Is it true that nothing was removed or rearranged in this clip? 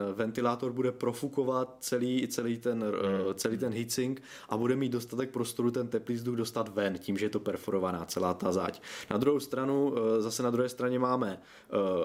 yes; 0 cuts

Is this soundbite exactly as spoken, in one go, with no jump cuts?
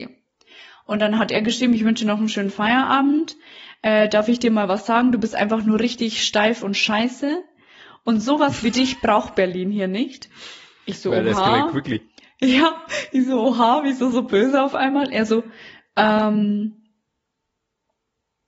yes; 0 cuts

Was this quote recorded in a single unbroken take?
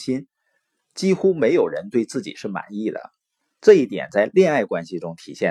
no; 1 cut; at 3.4 s

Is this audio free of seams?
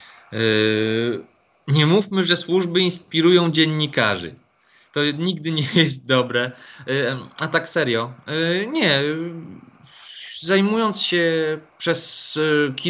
yes; 0 cuts

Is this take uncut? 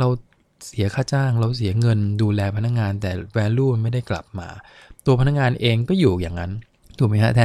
yes; 0 cuts

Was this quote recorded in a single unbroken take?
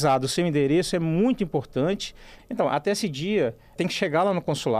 no; 2 cuts; at 2.4 s, 3.8 s

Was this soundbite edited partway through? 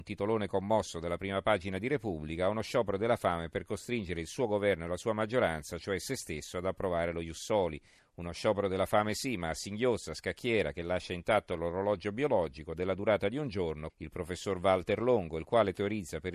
yes; 2 cuts; at 8.0 s, 13.9 s

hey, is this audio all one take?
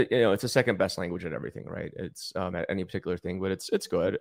no; 1 cut; at 2.5 s

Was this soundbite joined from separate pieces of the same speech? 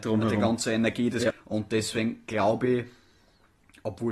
yes; 1 cut; at 1.3 s

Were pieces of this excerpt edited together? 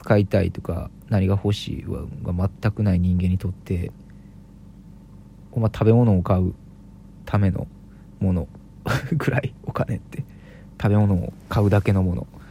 no; 0 cuts

